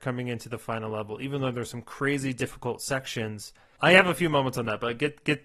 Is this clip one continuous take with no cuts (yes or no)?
no